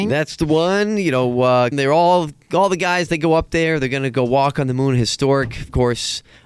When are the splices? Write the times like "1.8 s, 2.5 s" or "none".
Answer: 1.7 s

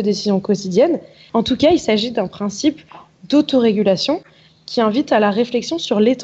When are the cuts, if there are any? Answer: 1.3 s

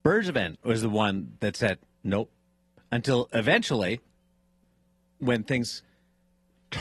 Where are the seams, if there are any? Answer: 2.0 s

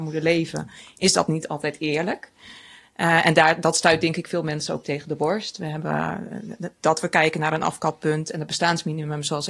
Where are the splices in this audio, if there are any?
none

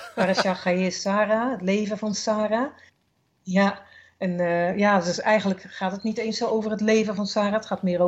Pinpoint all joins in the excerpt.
none

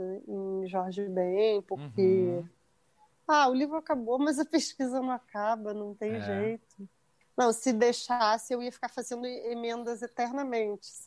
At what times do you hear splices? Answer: none

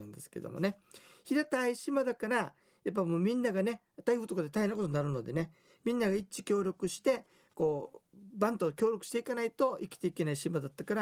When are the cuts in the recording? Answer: none

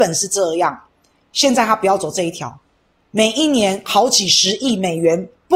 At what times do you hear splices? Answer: none

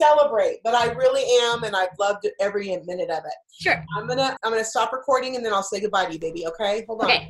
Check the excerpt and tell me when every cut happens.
4.4 s

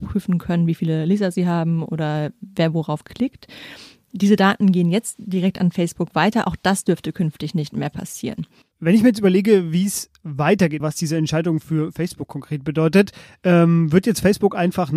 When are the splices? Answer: 10.8 s

